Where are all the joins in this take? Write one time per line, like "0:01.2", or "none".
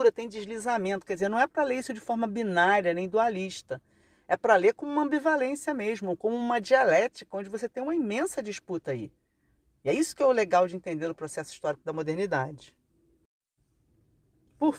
none